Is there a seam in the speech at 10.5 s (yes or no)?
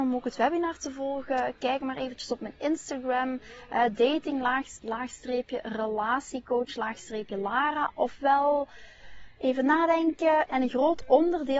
yes